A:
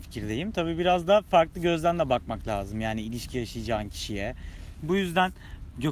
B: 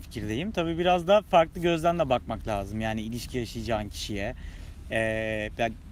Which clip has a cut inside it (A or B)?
A